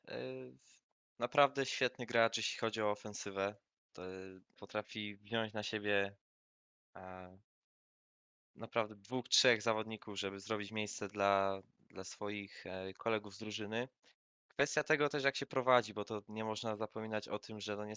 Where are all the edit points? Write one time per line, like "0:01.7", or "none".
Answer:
0:04.6